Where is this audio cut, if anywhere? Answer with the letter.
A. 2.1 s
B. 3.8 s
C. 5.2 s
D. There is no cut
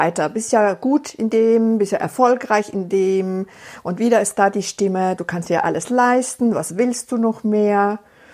C